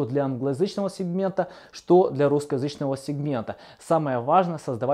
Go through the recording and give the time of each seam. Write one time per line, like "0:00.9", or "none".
none